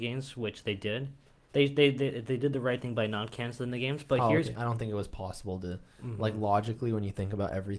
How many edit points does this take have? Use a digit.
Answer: 2